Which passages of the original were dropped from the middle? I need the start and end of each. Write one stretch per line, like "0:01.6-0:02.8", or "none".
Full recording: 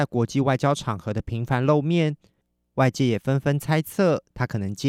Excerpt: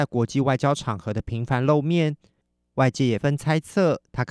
0:03.2-0:03.4